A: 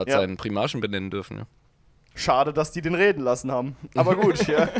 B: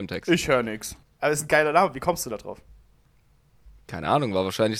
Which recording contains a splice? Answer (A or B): B